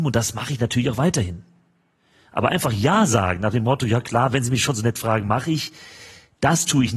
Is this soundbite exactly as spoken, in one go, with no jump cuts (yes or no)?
yes